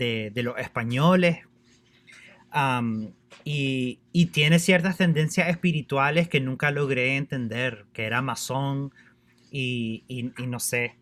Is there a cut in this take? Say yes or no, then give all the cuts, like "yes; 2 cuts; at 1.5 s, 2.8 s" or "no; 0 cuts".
no; 0 cuts